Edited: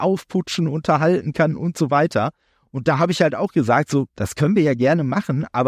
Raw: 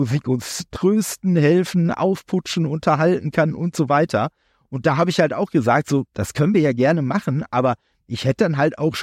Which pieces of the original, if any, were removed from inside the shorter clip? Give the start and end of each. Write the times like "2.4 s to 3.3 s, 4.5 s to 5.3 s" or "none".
none